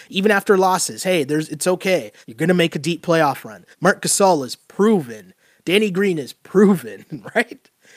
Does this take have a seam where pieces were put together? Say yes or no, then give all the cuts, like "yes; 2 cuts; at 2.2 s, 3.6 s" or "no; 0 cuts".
yes; 2 cuts; at 2.2 s, 3.7 s